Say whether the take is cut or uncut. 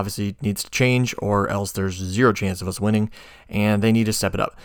uncut